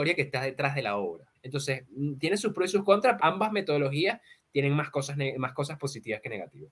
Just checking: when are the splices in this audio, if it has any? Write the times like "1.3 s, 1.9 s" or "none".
1.3 s, 3.2 s